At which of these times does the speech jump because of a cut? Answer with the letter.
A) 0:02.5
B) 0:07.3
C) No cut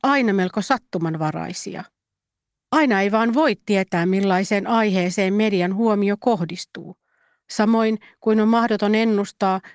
C